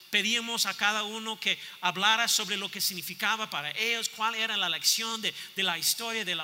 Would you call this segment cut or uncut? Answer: uncut